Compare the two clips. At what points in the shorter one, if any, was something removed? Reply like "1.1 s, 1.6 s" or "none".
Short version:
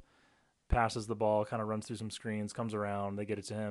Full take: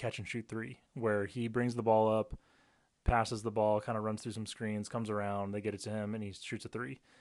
none